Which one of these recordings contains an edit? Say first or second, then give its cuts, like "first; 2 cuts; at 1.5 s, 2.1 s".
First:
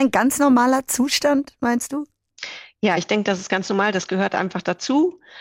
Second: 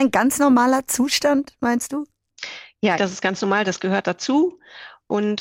second; 2 cuts; at 3.0 s, 4.0 s